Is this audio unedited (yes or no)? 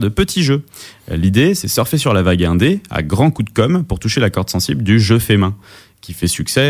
yes